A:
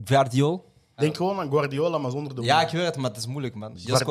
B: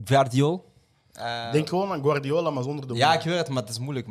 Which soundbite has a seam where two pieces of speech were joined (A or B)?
A